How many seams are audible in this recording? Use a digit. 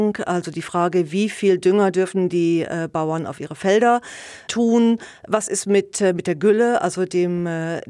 0